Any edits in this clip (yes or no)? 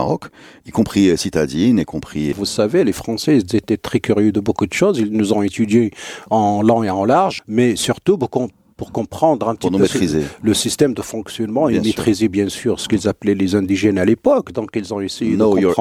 yes